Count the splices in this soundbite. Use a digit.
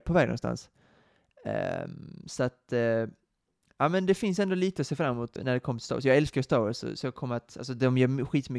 1